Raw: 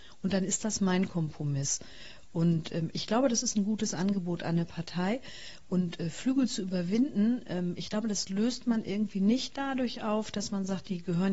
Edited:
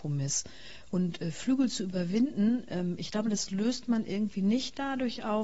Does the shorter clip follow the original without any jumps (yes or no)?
no